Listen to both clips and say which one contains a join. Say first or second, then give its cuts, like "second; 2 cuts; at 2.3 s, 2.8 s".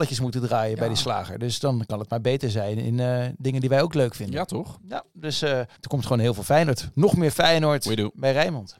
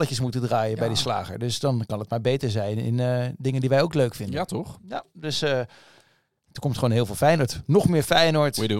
first; 1 cut; at 5.8 s